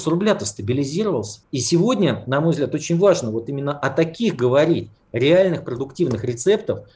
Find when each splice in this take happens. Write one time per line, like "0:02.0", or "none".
0:01.4